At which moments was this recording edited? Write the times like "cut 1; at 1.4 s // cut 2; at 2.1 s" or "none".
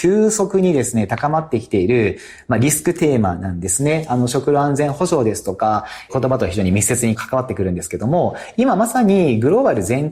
none